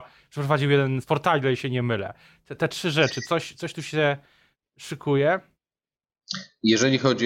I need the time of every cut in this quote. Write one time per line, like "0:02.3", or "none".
0:01.0